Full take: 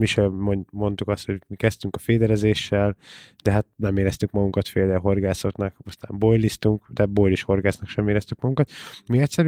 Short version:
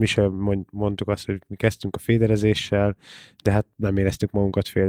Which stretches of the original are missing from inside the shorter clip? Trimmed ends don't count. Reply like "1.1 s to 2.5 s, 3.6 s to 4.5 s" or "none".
none